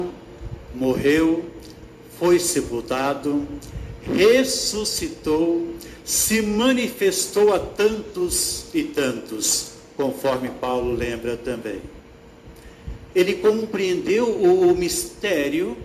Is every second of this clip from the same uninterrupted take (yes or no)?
no